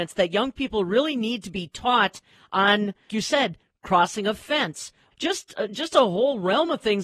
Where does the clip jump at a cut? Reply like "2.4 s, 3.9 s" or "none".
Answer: 3.1 s, 5.1 s